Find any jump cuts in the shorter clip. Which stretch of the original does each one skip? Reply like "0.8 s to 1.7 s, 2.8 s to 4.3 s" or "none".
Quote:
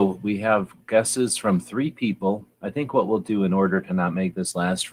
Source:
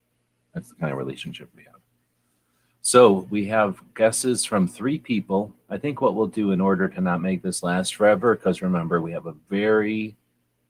none